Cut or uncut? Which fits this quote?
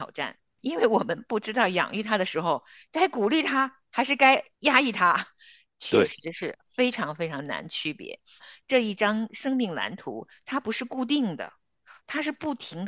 cut